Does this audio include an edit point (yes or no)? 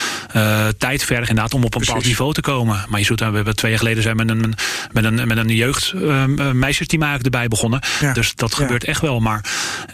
yes